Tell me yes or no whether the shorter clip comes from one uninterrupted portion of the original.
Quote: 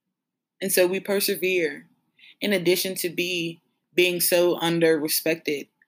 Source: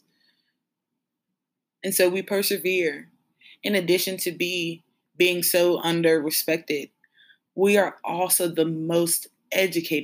yes